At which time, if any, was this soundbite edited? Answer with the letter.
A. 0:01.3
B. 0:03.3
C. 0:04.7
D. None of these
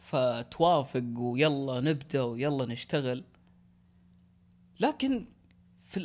D